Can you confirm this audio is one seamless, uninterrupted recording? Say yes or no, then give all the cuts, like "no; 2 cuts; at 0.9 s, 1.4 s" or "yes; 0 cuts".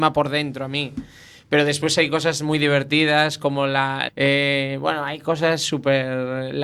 no; 1 cut; at 4.1 s